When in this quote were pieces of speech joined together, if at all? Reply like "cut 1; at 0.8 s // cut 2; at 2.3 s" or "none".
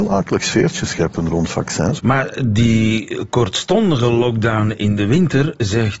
cut 1; at 2.0 s